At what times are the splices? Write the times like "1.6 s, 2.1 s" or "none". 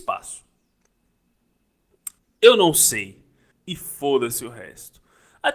2.2 s, 3.5 s